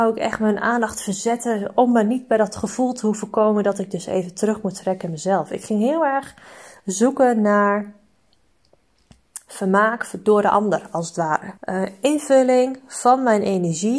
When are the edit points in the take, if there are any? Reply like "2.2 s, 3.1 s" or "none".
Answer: 11.6 s